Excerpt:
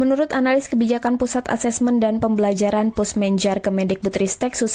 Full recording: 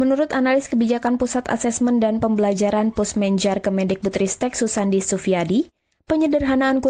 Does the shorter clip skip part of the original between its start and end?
no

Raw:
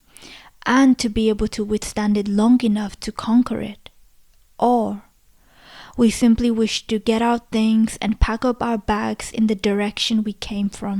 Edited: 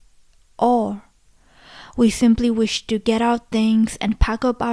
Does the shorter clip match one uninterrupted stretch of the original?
yes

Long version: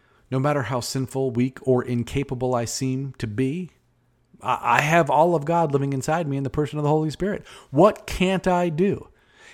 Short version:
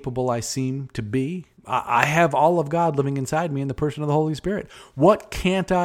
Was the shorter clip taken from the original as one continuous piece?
no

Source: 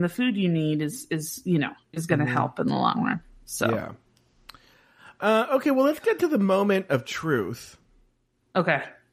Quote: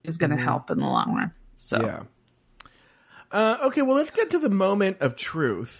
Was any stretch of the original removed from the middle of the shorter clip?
no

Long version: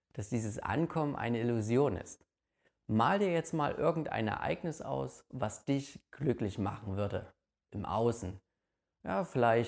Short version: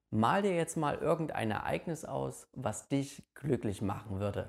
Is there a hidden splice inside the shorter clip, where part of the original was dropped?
no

